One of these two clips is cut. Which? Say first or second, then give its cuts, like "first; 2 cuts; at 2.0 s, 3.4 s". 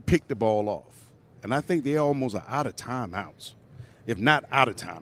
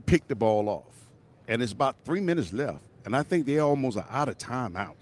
first; 1 cut; at 1.3 s